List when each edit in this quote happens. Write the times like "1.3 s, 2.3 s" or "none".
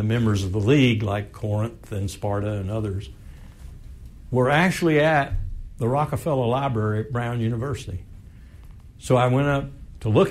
none